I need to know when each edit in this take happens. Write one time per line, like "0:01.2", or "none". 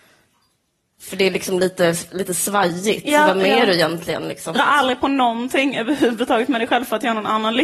0:04.5

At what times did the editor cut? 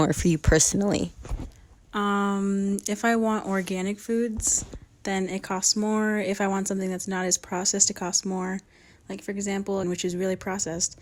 0:09.8

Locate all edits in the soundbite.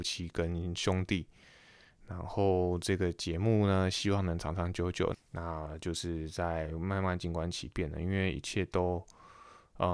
0:05.1

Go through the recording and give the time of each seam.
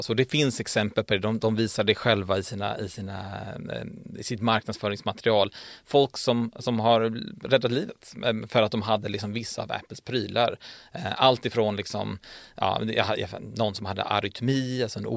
none

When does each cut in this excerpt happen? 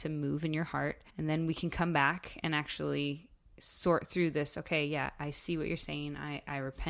0:01.1

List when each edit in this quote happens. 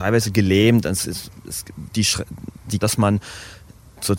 0:02.8

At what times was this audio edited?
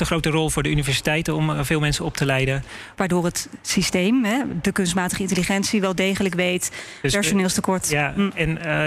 0:02.9
0:07.0

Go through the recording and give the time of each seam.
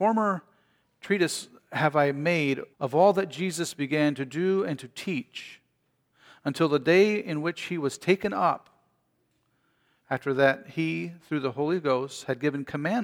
0:02.7

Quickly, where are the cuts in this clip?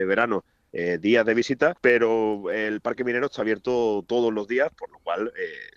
0:01.8

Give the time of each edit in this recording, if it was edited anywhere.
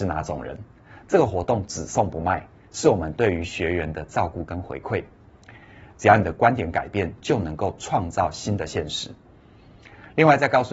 0:05.9

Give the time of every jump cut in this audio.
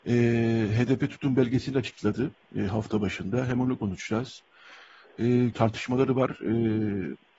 0:05.5

